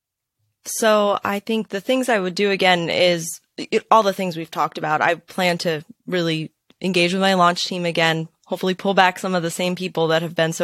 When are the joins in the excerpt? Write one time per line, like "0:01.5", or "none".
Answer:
none